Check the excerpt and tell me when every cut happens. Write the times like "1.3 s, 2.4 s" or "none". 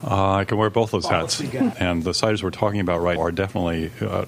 1.7 s, 3.2 s